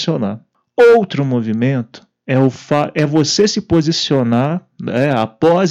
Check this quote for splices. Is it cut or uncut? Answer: uncut